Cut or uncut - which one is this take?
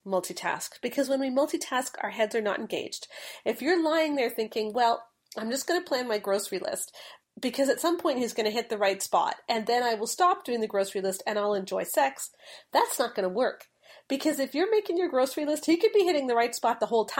uncut